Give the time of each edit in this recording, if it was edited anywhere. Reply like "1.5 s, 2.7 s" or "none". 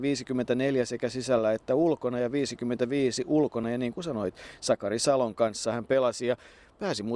none